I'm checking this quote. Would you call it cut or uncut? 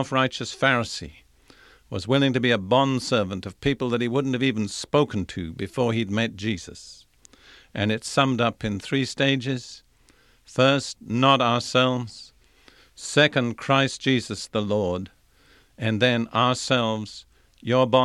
uncut